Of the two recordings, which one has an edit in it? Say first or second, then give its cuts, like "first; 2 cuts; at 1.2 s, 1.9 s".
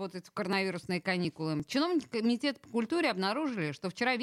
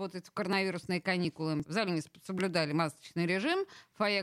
second; 1 cut; at 1.7 s